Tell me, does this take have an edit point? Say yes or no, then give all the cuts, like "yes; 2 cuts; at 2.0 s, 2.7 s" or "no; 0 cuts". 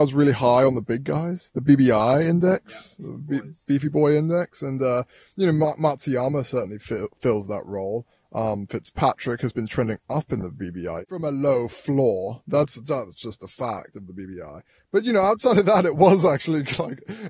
no; 0 cuts